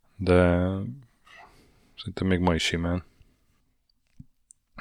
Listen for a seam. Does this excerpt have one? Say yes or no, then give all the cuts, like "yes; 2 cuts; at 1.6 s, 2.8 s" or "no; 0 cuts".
no; 0 cuts